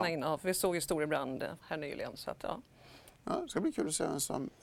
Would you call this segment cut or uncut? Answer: cut